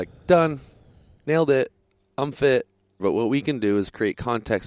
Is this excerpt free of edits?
no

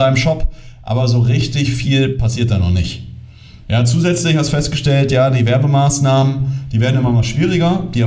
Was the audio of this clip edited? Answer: no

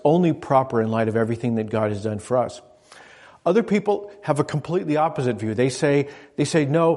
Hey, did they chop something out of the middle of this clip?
no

